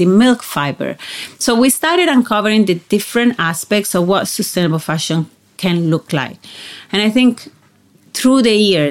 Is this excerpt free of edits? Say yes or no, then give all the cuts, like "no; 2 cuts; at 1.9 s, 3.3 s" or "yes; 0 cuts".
yes; 0 cuts